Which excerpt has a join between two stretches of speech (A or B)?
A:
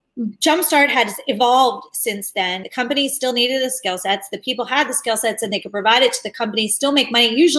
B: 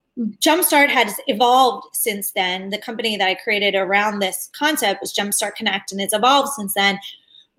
A